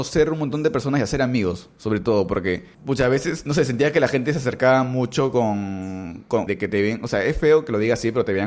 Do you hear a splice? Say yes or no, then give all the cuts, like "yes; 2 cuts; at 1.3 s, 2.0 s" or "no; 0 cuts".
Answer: yes; 2 cuts; at 2.7 s, 6.5 s